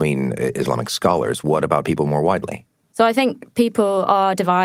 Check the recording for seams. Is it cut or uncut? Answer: uncut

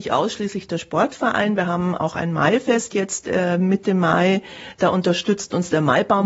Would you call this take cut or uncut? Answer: uncut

